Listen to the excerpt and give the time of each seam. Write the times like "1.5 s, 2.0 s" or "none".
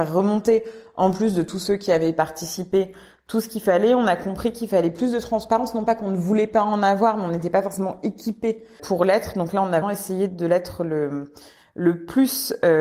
8.8 s, 9.8 s